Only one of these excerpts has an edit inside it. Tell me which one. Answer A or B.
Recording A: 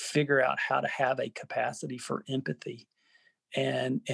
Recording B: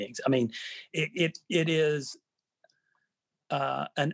B